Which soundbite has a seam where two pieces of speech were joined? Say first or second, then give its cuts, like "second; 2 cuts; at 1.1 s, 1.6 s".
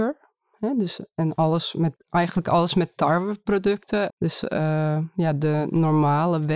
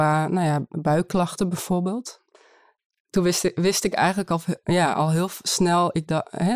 first; 1 cut; at 4.1 s